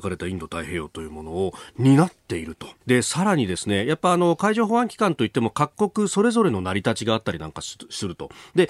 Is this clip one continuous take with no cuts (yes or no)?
no